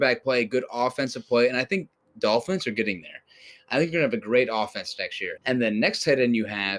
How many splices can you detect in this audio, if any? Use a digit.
1